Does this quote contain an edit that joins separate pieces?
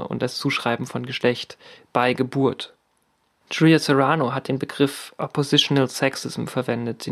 yes; 1 cut; at 3.4 s

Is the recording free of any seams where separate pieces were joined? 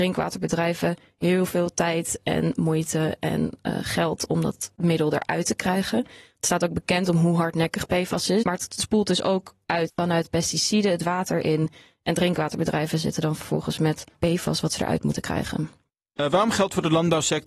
no; 1 cut; at 8.4 s

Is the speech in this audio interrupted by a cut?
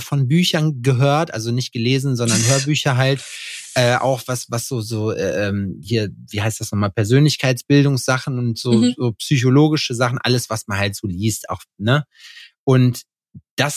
no; 0 cuts

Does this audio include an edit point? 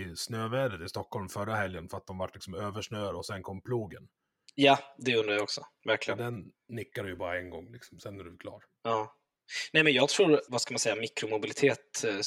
yes; 1 cut; at 10.5 s

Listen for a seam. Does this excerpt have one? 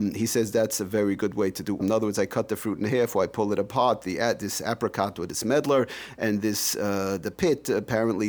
yes; 1 cut; at 1.8 s

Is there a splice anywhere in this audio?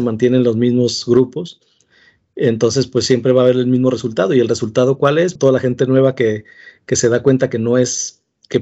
yes; 1 cut; at 5.4 s

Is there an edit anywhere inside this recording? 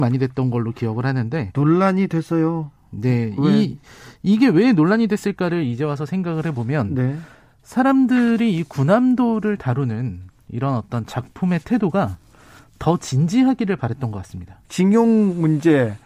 yes; 1 cut; at 14.6 s

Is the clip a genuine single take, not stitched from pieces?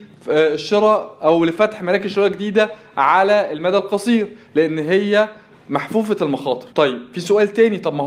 no; 1 cut; at 6.7 s

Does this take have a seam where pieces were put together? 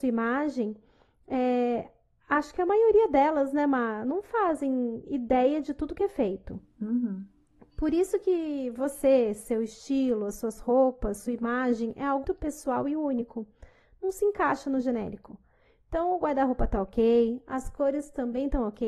yes; 1 cut; at 12.2 s

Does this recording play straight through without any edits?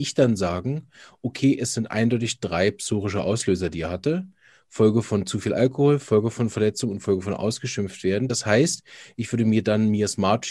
yes; 0 cuts

